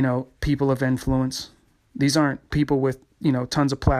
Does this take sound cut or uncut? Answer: uncut